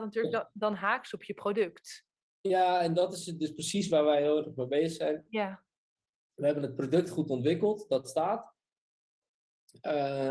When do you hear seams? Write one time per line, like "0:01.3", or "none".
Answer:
none